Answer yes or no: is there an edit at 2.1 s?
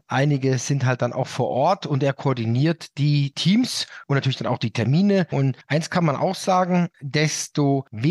no